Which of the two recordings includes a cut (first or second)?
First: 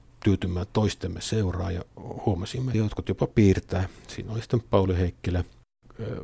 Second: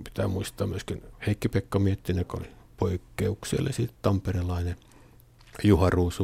first